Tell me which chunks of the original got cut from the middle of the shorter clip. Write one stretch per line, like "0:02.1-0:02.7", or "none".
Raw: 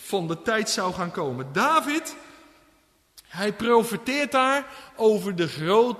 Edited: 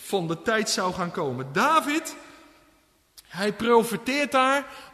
none

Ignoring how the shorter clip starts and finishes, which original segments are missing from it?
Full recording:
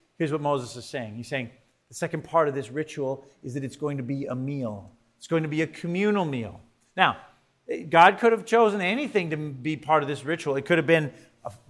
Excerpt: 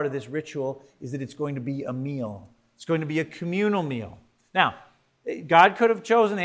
none

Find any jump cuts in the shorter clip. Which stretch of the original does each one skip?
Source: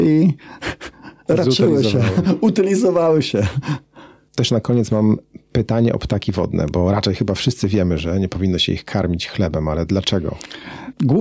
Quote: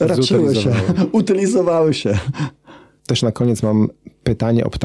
none

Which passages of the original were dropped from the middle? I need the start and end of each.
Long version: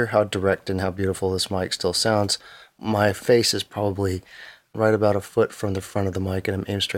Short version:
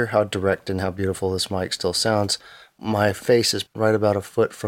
0:03.7-0:04.6

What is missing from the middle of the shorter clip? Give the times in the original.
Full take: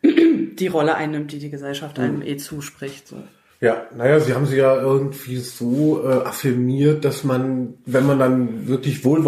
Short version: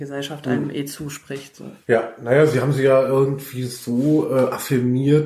0:03.3-0:03.5

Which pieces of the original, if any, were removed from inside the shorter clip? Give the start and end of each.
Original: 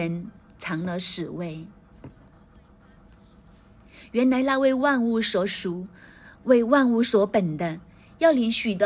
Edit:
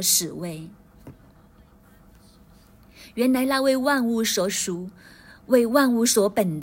none

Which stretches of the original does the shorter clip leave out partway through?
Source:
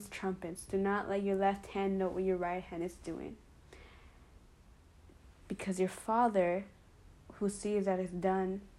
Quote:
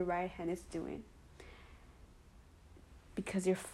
none

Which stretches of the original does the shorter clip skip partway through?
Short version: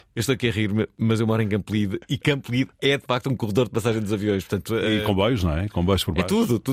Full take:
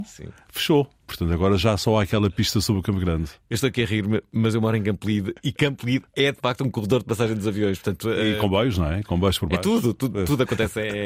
none

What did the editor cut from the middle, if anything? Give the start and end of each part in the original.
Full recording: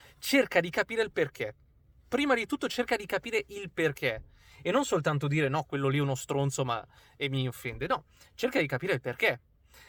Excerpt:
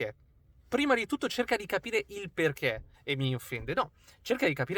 0:04.3-0:07.1

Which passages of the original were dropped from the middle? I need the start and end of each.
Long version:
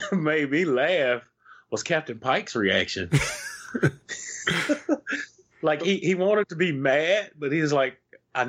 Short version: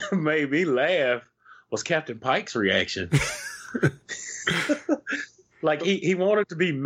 none

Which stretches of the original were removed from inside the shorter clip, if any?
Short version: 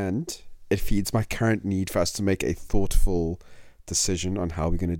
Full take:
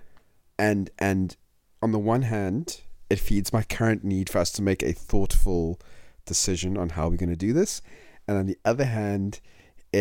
none

